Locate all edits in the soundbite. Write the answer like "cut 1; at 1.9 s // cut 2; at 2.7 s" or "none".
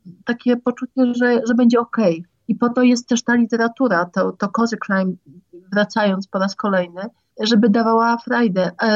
cut 1; at 2.4 s

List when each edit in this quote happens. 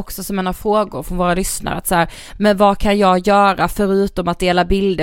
none

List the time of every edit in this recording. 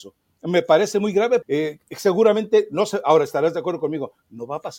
cut 1; at 1.4 s

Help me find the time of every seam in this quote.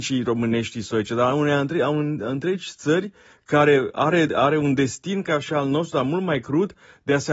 none

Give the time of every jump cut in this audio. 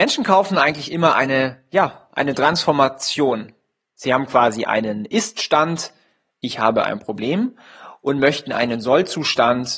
none

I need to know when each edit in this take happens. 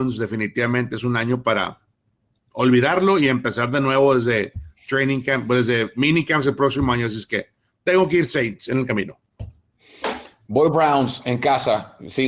none

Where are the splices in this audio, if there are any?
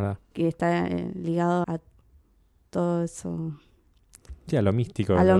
cut 1; at 1.6 s

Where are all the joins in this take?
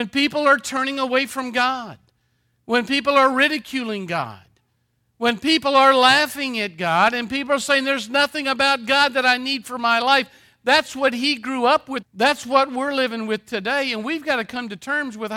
cut 1; at 12.0 s

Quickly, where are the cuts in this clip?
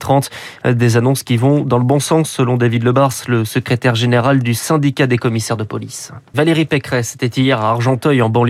cut 1; at 6.3 s

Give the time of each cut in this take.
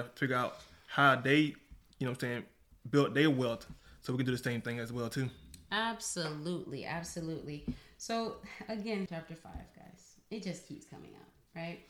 cut 1; at 9.1 s

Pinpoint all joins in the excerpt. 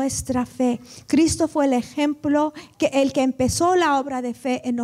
cut 1; at 2.9 s

